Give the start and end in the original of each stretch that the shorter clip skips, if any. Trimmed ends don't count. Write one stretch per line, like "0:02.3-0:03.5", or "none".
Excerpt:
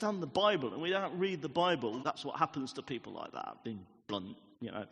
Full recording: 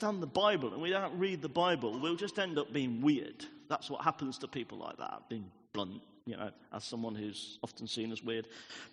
0:02.0-0:03.7